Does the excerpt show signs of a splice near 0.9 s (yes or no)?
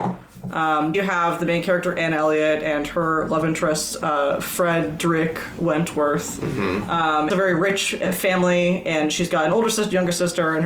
yes